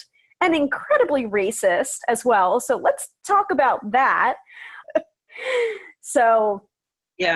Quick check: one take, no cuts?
no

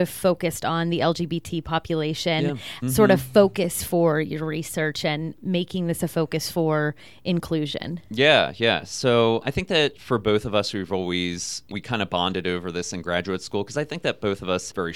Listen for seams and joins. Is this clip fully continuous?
no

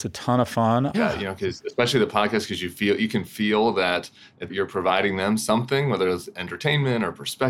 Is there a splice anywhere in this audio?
yes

